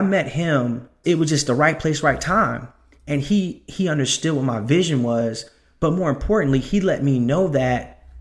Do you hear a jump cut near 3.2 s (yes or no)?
no